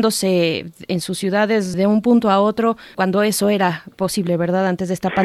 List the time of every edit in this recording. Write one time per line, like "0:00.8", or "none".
0:01.7
0:02.9